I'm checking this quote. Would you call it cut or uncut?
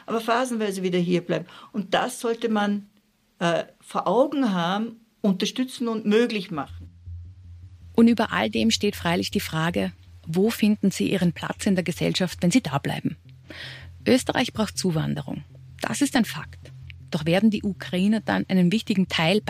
uncut